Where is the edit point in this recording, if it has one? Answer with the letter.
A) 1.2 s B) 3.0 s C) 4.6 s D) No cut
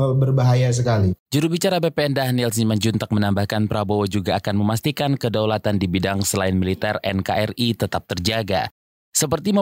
A